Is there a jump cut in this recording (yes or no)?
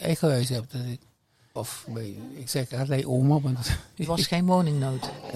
yes